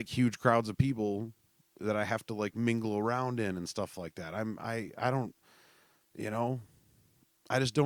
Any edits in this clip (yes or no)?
no